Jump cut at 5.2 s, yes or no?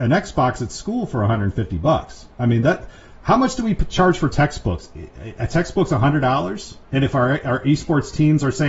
no